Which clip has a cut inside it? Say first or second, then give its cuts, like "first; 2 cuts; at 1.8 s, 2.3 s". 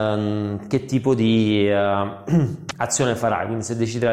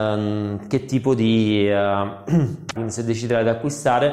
second; 1 cut; at 2.8 s